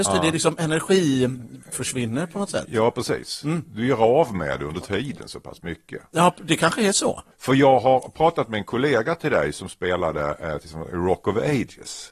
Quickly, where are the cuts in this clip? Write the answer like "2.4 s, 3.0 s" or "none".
7.3 s